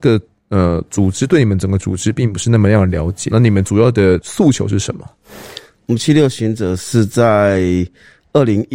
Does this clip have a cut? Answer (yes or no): yes